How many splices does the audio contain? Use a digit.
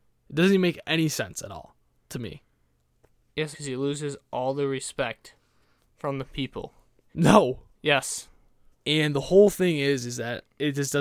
3